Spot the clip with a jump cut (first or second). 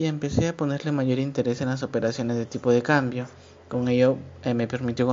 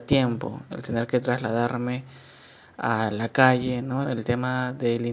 second